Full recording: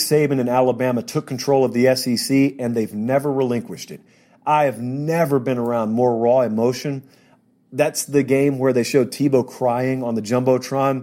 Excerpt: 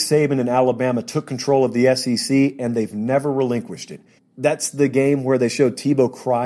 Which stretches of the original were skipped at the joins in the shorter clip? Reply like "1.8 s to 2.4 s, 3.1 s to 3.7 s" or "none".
4.2 s to 7.5 s

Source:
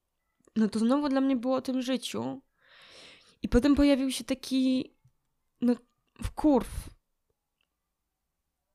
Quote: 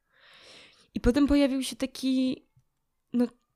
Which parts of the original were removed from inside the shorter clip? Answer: none

